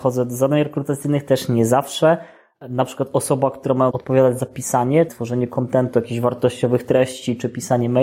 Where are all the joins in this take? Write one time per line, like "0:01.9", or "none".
0:03.9
0:05.1